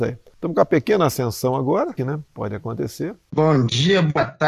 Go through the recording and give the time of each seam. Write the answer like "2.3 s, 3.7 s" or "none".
2.0 s, 3.3 s